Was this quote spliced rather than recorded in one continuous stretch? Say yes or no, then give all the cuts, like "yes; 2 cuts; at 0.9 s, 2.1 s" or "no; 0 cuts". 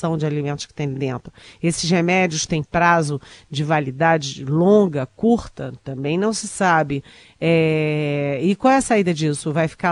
no; 0 cuts